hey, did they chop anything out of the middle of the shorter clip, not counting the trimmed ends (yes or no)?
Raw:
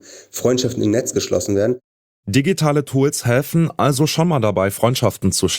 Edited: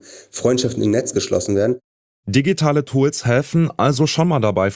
no